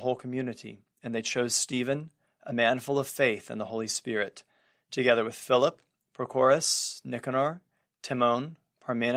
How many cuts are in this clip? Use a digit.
0